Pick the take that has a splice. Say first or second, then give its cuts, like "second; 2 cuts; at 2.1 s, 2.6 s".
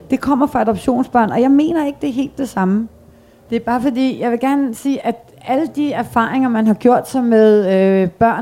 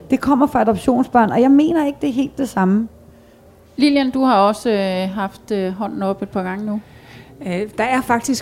first; 1 cut; at 3.5 s